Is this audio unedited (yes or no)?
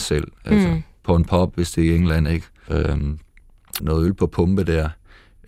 no